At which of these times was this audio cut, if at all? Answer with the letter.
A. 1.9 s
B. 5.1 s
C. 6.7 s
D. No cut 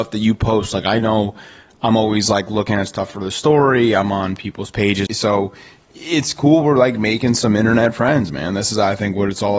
B